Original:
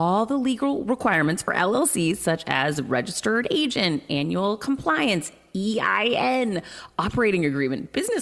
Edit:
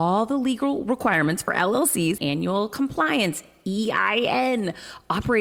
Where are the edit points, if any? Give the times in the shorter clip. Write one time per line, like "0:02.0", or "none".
0:02.2